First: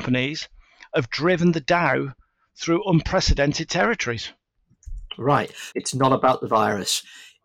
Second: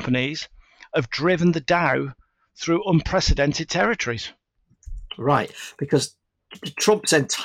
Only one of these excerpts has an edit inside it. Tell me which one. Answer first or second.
first